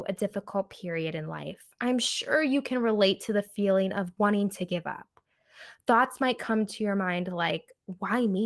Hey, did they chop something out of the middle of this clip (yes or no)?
yes